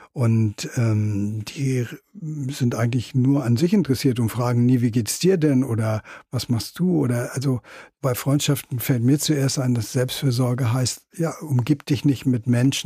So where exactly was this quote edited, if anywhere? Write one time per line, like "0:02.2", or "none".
none

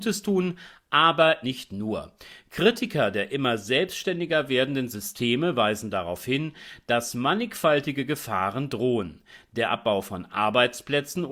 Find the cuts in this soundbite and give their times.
0:01.4

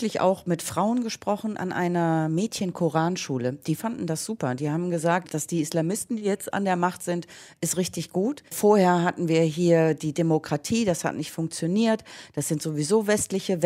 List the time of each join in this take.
0:05.2
0:08.5

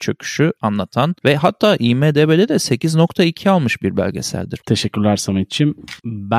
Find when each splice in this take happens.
0:04.6

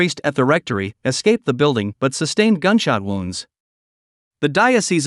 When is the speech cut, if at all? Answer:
0:01.0

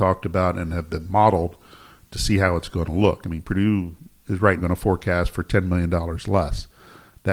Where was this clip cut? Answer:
0:04.6

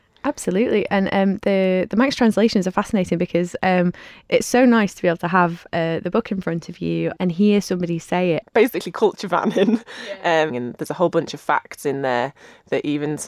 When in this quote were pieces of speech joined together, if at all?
0:10.5

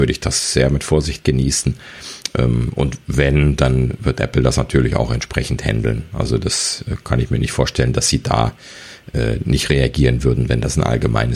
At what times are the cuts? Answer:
none

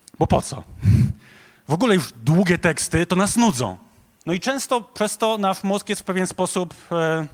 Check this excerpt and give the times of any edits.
0:04.2

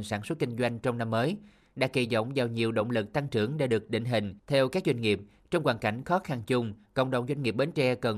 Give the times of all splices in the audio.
0:04.4

